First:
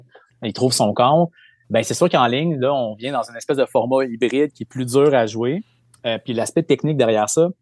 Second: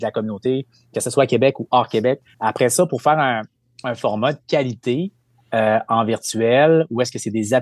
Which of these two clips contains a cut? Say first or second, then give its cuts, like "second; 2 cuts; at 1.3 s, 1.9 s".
second; 1 cut; at 2.3 s